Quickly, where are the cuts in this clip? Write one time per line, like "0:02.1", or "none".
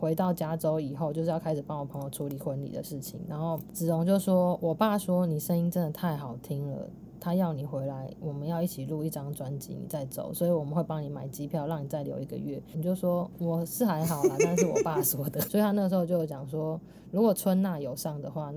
0:12.7
0:15.5